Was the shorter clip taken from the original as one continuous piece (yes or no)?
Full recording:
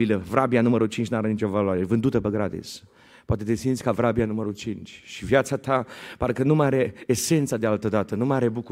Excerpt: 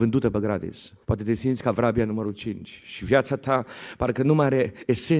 no